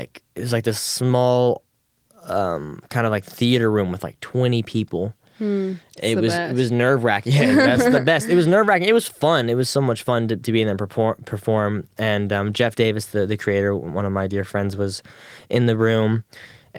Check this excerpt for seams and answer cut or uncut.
uncut